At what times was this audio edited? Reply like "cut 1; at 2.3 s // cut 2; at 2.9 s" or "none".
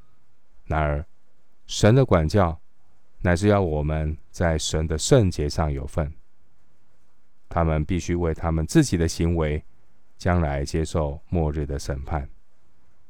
cut 1; at 7.5 s